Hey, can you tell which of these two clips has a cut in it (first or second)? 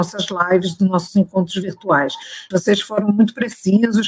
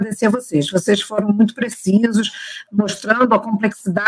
first